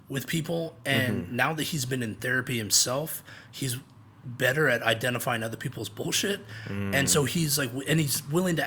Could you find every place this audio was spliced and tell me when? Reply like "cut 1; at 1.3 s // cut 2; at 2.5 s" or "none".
none